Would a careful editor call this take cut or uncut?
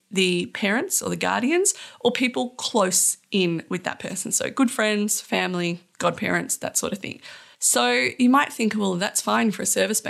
cut